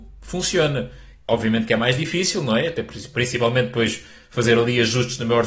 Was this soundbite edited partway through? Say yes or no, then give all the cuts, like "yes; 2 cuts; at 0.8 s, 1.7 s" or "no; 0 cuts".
no; 0 cuts